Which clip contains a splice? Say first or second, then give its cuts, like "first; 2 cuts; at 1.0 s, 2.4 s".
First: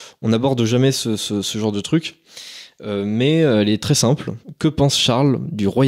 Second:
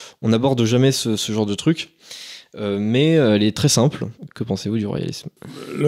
second; 2 cuts; at 1.2 s, 4.3 s